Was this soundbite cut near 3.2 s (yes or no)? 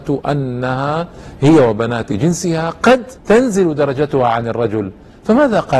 yes